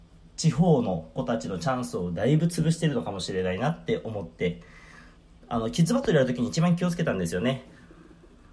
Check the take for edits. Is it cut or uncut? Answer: uncut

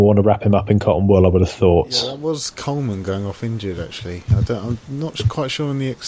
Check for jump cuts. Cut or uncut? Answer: uncut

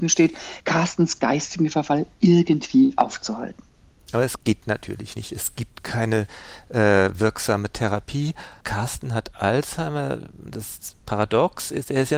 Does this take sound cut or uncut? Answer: cut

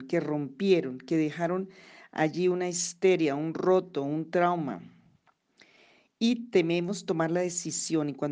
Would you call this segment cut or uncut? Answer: uncut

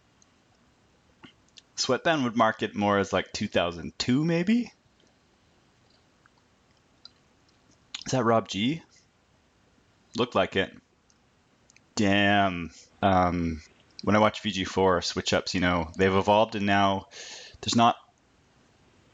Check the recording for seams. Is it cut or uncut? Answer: cut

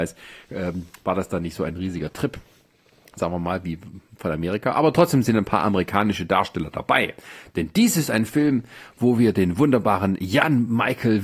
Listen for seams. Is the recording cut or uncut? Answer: uncut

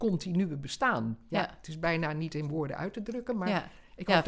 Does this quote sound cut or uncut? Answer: uncut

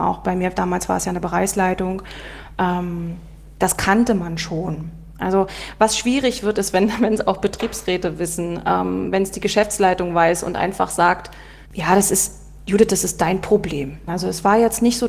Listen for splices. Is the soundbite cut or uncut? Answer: cut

